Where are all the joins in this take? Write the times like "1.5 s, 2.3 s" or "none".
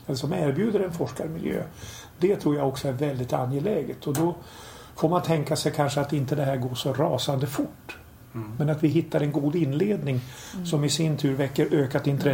none

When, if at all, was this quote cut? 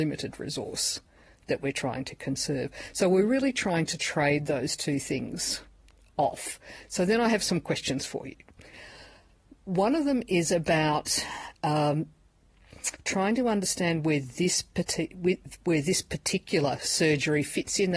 none

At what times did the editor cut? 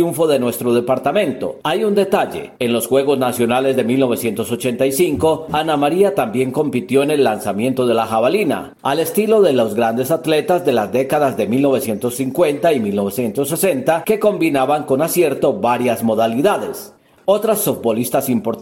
1.6 s

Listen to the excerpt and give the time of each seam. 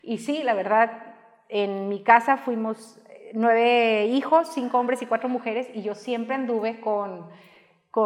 none

